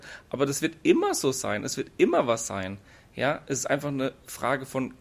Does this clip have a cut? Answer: no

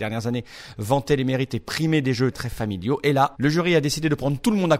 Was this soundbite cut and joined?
yes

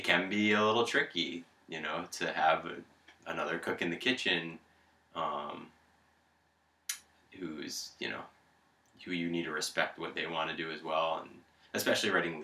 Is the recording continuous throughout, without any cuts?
yes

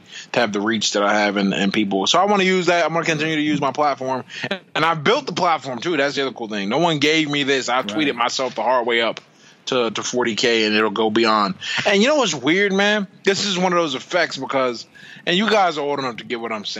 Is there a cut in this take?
no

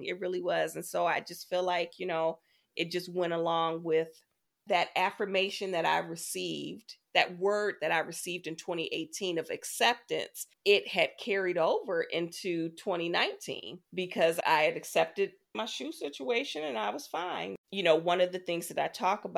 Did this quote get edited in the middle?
yes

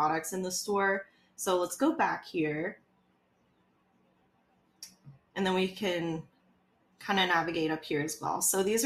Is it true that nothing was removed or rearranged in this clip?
yes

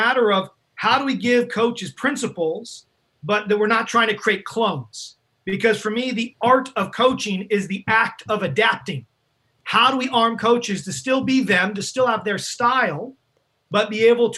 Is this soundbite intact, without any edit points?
yes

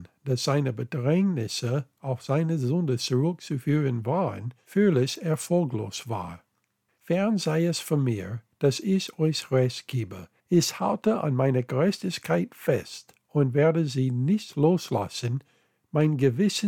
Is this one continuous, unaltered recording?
no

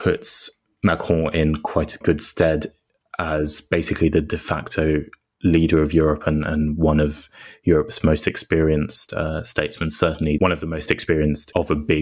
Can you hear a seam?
no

